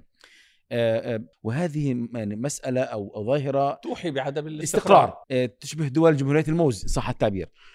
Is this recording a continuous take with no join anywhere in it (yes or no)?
no